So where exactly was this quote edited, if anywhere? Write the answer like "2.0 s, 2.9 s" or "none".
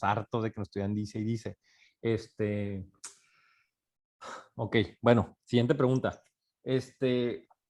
none